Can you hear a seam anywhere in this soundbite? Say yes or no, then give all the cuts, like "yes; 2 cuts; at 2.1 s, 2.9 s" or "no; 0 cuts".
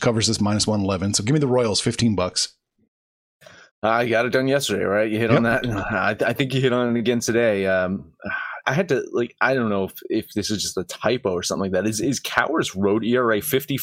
yes; 1 cut; at 8.6 s